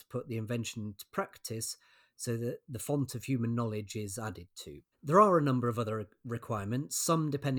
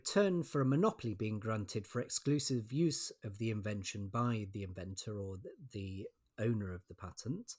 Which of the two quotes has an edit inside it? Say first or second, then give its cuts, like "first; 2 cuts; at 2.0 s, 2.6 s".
first; 1 cut; at 4.9 s